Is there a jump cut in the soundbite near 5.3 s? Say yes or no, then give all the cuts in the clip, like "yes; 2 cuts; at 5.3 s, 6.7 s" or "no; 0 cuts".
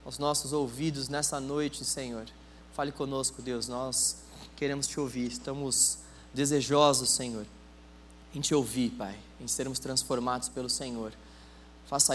no; 1 cut; at 2.6 s